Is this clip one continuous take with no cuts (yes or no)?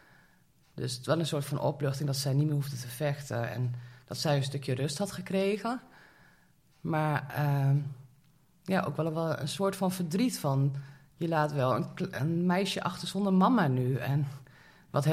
yes